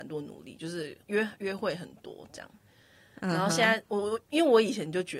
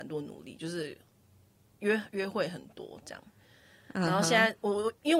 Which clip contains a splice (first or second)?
first